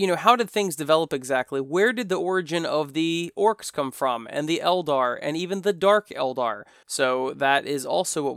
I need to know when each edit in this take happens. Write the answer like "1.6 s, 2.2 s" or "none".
6.8 s